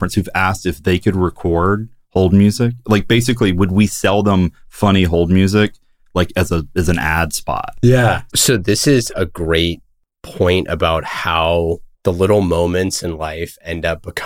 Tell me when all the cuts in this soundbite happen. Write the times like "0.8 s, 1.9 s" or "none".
8.3 s, 11.9 s